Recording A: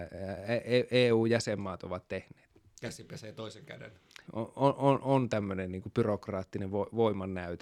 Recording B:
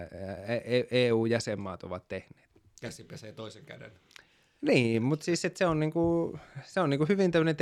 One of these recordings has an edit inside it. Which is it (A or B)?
A